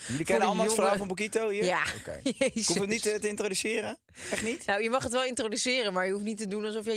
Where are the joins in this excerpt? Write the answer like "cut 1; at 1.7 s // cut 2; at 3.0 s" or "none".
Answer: none